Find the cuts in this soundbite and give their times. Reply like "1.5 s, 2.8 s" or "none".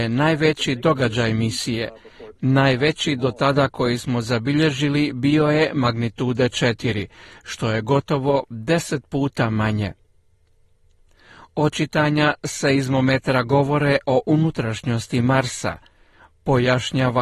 2.4 s